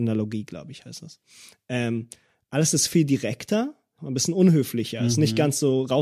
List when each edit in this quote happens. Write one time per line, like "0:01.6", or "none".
0:04.0